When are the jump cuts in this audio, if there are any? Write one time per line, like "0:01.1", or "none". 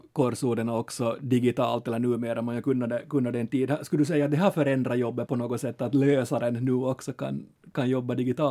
0:05.3